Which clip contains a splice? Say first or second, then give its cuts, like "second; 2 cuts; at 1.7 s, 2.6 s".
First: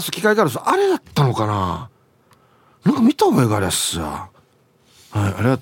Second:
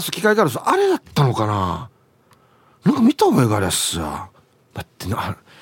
second; 1 cut; at 4.7 s